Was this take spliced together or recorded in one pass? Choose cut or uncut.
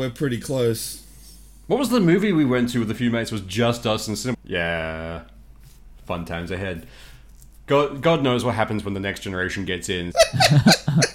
cut